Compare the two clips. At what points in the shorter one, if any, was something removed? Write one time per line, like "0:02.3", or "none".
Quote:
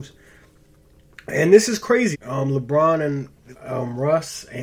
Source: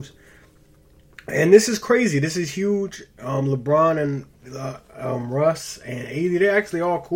0:02.1
0:03.5